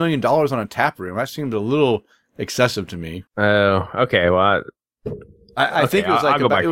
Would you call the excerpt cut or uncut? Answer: cut